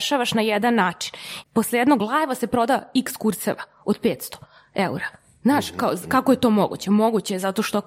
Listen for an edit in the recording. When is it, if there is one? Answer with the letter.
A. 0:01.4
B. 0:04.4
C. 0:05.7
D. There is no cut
A